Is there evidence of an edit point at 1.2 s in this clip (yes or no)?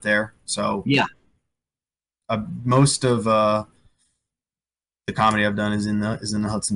no